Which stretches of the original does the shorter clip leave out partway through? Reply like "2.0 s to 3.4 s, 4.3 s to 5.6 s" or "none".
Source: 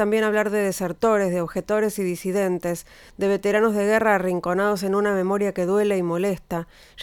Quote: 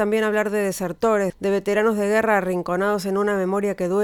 1.3 s to 3.1 s